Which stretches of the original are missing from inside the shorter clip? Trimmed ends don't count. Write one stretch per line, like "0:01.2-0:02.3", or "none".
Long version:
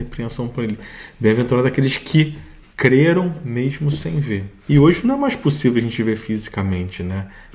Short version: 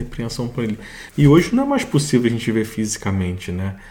0:01.1-0:04.6